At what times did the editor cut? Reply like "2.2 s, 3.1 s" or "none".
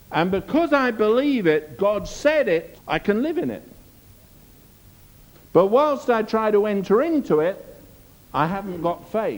2.7 s

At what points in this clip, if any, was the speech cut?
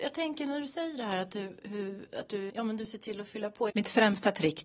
2.5 s, 3.7 s

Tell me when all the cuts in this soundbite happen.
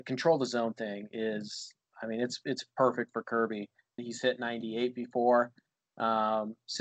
4.0 s

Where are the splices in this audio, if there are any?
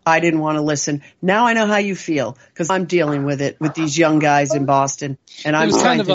2.7 s

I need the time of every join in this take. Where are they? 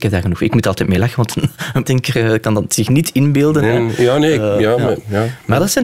1.9 s

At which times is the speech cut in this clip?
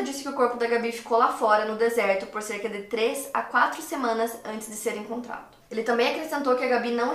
5.6 s

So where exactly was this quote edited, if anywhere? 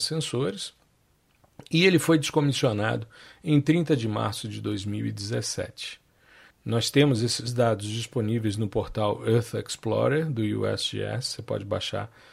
6.5 s

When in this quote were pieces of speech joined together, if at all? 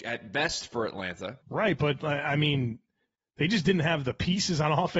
1.4 s

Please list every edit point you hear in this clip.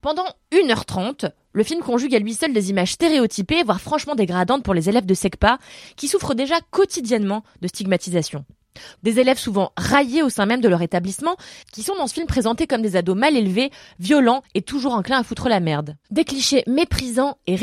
9.0 s, 16.0 s

